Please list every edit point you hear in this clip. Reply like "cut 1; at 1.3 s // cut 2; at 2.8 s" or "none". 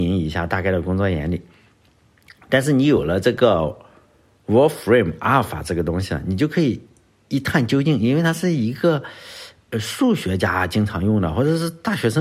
none